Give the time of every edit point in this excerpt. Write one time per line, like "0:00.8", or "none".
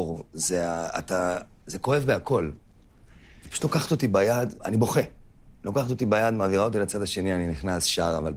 0:04.6